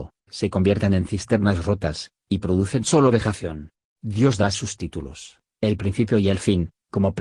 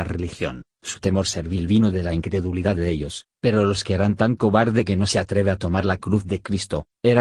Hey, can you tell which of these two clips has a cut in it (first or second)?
first